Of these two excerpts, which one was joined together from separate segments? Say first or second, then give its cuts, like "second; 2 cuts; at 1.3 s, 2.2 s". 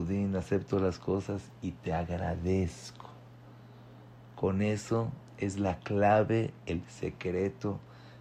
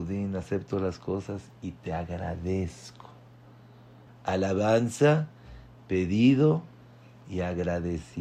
second; 1 cut; at 4.1 s